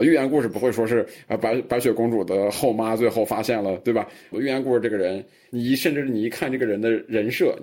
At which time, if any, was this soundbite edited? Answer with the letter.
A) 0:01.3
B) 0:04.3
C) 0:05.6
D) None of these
B